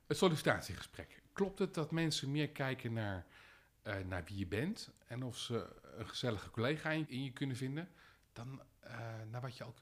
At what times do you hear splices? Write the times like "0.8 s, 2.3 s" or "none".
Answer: none